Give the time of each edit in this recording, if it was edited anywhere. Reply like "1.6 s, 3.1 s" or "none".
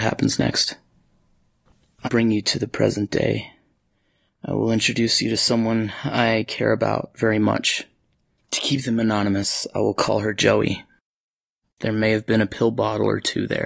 2.0 s, 11.6 s